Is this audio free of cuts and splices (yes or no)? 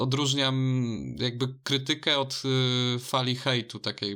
yes